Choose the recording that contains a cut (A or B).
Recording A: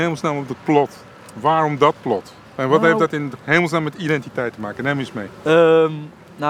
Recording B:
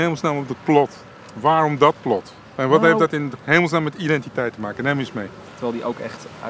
B